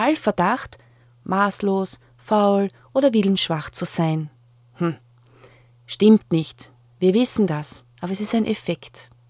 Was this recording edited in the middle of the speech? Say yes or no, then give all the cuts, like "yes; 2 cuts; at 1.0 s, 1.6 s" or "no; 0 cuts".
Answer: no; 0 cuts